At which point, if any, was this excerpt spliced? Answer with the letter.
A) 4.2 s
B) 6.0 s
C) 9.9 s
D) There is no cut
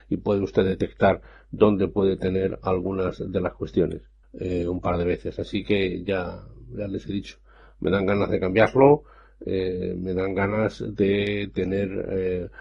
A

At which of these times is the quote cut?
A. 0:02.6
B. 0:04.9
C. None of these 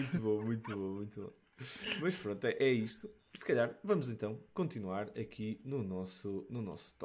A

